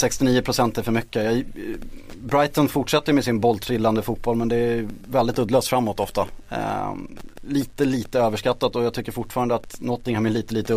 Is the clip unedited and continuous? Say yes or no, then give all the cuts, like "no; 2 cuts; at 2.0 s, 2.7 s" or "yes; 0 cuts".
yes; 0 cuts